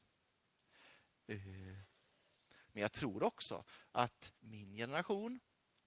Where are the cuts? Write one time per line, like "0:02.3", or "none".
0:02.7
0:04.4